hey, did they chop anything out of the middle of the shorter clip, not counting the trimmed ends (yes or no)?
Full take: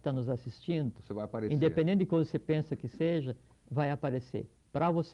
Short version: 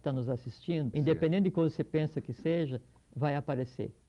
yes